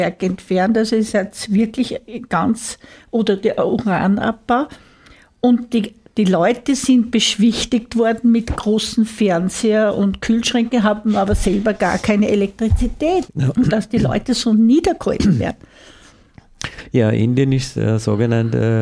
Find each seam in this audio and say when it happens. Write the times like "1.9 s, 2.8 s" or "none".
13.3 s